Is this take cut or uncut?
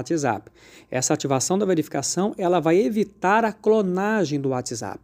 uncut